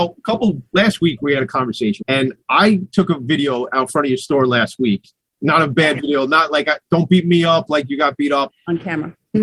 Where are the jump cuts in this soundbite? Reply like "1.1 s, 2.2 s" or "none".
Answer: 2.0 s, 8.5 s